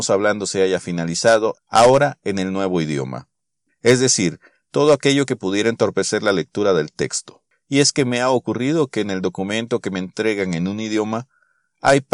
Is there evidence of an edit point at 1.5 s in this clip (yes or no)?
yes